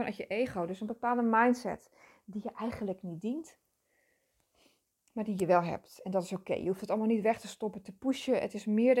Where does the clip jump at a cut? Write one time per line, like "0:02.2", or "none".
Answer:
none